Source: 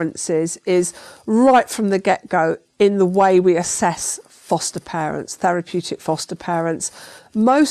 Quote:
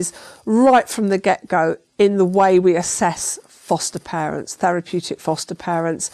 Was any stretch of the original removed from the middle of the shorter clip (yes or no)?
no